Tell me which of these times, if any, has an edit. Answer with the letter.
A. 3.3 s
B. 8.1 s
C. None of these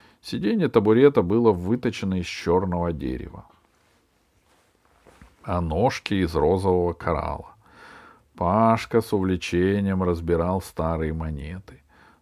C